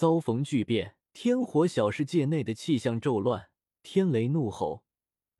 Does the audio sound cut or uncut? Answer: cut